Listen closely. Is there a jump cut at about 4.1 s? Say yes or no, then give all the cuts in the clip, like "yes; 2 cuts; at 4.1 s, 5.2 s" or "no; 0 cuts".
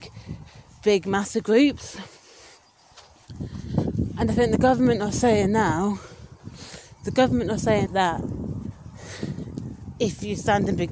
no; 1 cut; at 7.9 s